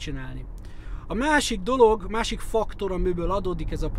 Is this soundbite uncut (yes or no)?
yes